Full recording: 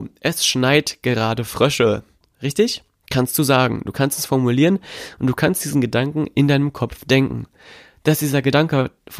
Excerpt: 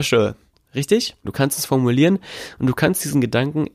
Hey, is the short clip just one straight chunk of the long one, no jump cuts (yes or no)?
no